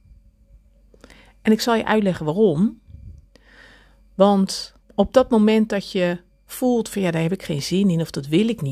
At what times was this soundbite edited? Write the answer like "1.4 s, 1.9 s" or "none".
4.8 s